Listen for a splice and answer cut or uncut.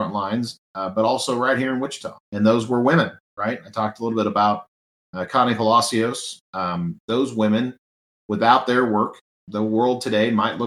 cut